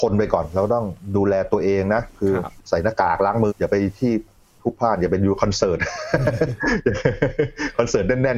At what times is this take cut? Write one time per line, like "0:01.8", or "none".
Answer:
0:03.5